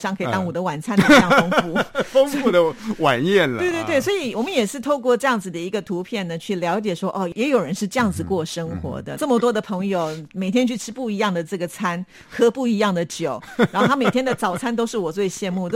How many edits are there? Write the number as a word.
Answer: one